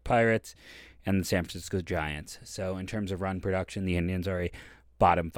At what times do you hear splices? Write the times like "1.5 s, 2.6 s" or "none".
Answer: none

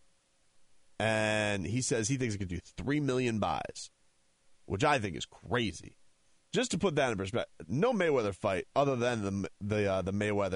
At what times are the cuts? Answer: 6.4 s

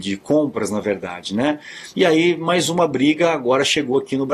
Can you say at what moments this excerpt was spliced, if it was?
1.9 s

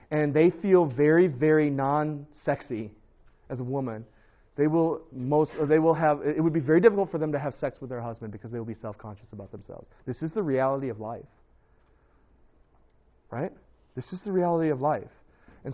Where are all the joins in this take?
none

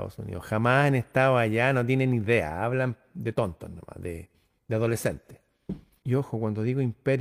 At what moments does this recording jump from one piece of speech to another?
6.0 s

